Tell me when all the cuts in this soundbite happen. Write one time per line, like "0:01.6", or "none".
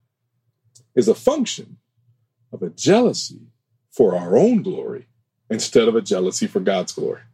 none